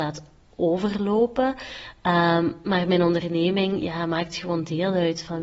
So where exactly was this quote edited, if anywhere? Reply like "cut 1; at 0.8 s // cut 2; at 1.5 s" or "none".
none